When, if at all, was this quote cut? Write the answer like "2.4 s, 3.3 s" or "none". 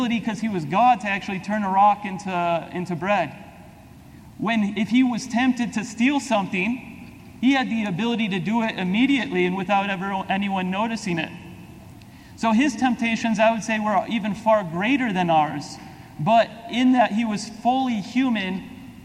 none